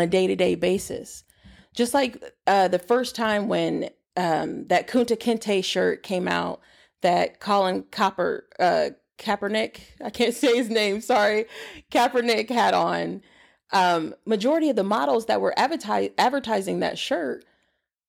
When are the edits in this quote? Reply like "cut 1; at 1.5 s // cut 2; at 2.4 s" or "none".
none